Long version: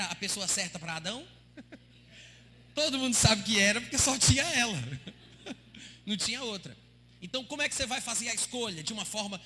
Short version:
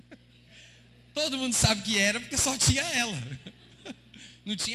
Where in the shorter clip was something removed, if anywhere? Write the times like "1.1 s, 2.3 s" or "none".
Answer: none